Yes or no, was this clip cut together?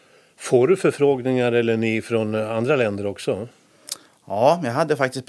no